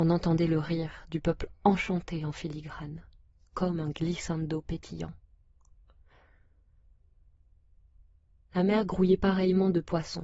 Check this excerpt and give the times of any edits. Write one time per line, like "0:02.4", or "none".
none